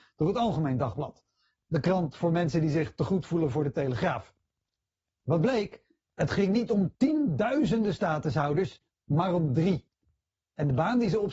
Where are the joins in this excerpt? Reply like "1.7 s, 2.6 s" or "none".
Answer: none